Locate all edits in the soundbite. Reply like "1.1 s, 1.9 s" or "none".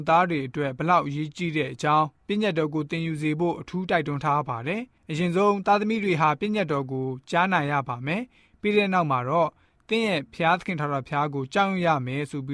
none